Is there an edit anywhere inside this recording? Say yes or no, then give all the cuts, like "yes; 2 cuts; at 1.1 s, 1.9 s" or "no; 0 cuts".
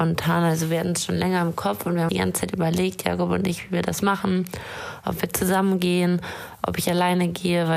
yes; 1 cut; at 2.1 s